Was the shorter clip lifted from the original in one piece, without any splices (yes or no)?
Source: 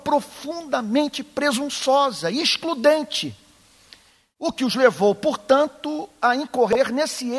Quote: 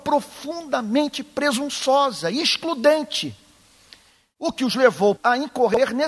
no